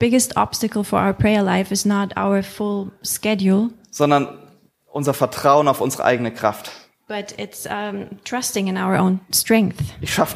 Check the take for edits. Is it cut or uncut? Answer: uncut